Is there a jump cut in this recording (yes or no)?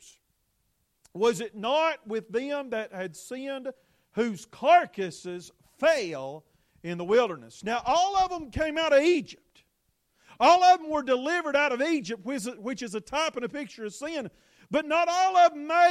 no